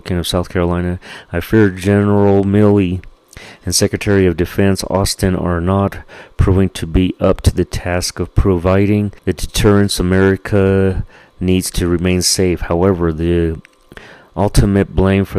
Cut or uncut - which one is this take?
cut